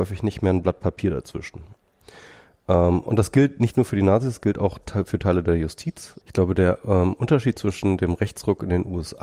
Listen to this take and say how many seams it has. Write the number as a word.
one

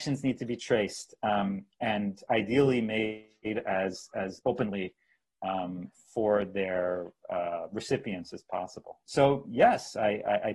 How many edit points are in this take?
one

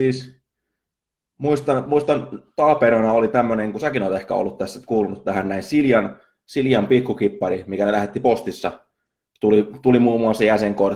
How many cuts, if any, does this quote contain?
zero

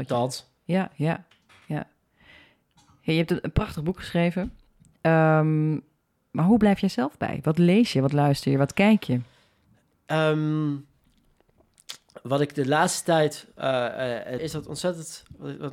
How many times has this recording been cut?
one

